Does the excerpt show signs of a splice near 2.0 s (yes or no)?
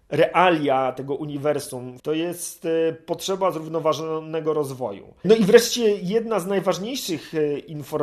yes